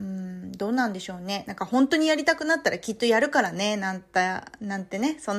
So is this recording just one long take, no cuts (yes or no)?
no